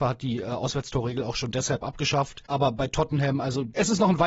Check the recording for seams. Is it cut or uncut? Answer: cut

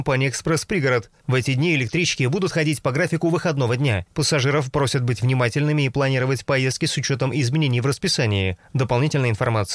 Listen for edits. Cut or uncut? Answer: cut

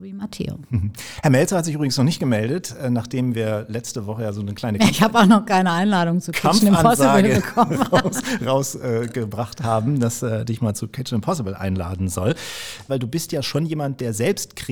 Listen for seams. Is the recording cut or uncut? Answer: cut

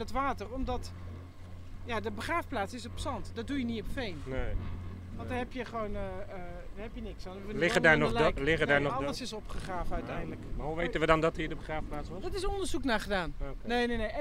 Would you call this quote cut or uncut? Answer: uncut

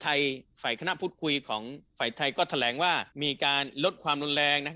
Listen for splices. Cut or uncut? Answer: cut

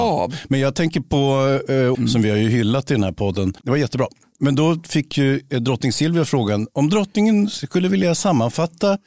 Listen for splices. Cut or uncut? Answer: cut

